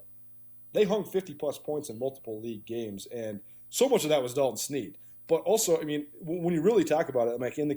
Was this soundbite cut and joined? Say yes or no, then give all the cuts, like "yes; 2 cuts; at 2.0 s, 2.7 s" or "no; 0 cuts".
no; 0 cuts